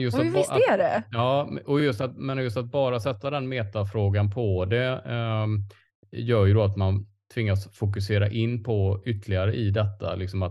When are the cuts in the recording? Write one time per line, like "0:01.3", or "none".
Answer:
none